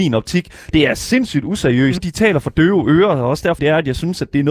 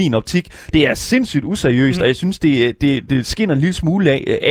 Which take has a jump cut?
first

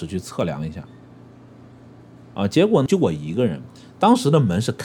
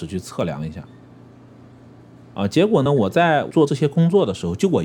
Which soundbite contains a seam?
first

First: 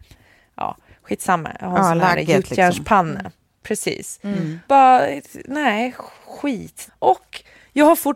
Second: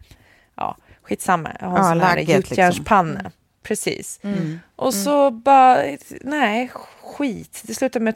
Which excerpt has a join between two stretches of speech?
first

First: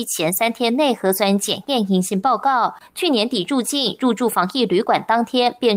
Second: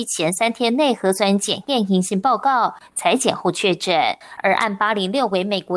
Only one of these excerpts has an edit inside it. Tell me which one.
second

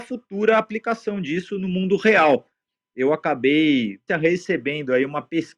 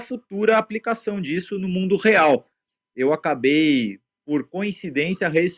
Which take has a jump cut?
first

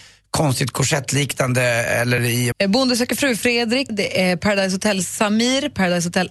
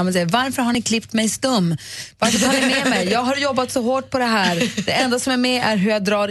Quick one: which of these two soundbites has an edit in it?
first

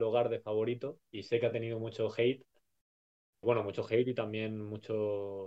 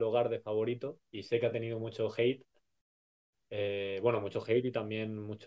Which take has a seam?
first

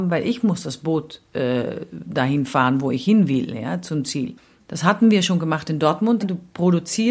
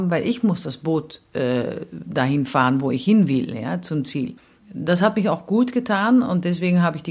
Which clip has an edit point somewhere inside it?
first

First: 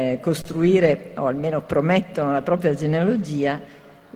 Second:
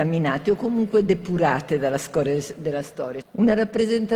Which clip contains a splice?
second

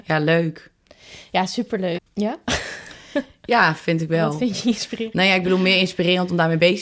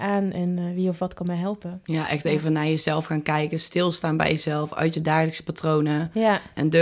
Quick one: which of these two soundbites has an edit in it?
first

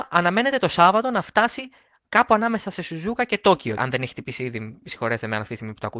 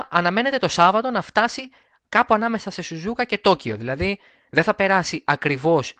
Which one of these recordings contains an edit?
first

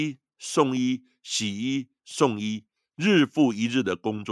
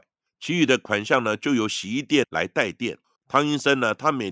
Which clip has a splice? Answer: second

